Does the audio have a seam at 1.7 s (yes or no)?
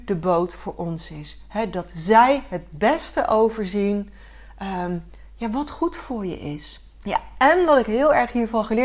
no